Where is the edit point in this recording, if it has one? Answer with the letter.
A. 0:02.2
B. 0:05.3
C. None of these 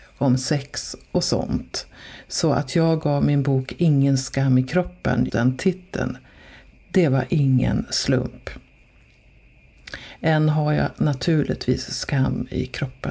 B